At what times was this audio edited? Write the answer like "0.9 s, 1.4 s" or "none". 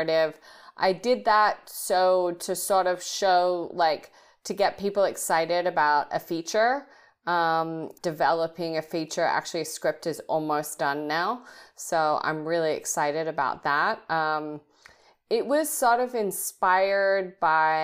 8.0 s